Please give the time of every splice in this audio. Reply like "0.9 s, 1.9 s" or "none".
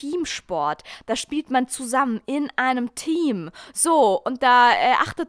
none